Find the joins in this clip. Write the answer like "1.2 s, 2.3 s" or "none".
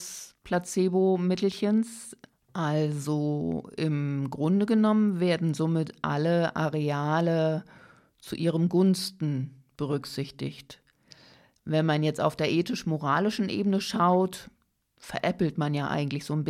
2.3 s